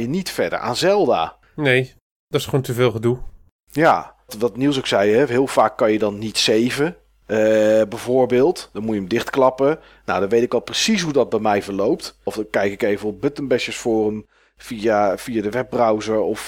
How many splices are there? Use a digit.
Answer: 2